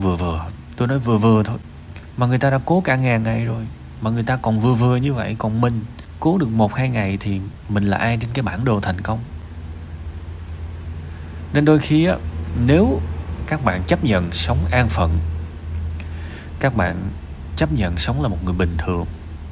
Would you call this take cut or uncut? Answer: uncut